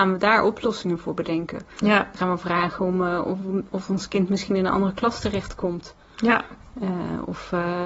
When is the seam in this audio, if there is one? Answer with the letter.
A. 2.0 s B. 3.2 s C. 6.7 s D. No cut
D